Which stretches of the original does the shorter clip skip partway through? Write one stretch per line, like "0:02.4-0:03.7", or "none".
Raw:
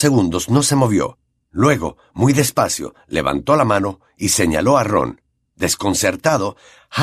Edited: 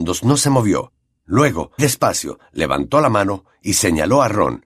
0:02.0-0:02.3

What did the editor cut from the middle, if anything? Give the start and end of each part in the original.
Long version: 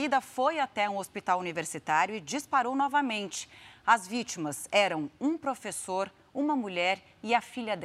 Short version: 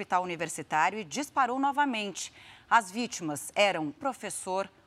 0:05.1-0:05.4

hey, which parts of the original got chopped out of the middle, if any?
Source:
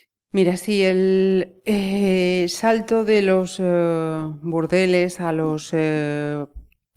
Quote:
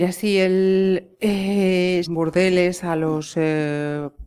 0:02.5-0:04.4

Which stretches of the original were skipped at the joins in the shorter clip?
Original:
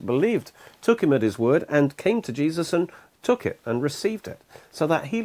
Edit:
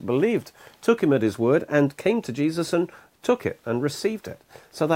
none

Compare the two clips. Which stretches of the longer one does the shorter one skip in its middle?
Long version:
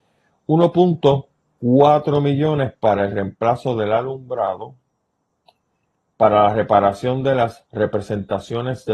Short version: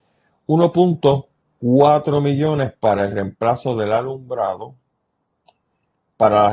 none

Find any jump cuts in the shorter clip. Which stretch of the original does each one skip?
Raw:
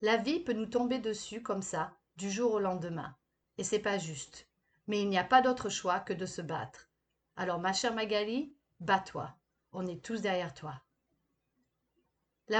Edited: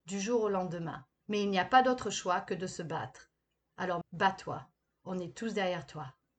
0:03.3-0:04.8
0:07.6-0:08.7

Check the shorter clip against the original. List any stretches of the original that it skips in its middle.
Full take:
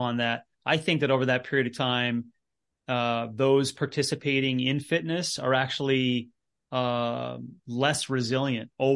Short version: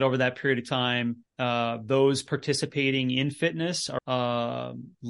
0:02.3-0:02.8
0:05.5-0:06.6

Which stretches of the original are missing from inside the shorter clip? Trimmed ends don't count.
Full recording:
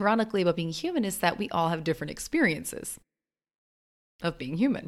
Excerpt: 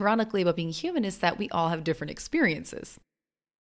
none

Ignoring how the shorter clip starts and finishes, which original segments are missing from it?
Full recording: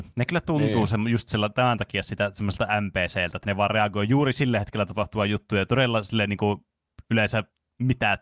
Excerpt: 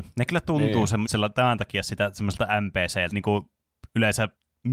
0:01.1-0:01.3
0:03.3-0:06.3

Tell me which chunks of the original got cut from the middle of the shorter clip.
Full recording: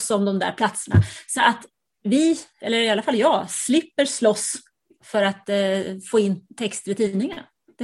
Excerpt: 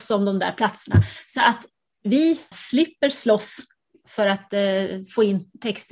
0:02.5-0:03.5

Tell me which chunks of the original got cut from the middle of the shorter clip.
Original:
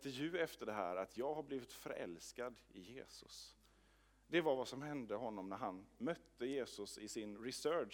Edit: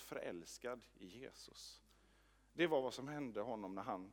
none

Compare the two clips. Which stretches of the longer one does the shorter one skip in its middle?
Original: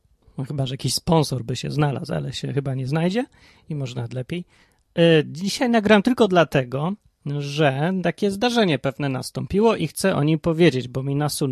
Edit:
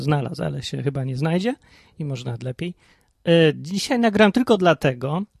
none

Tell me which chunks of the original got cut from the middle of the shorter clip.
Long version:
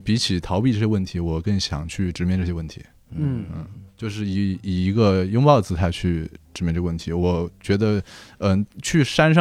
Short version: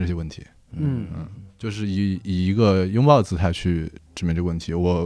none

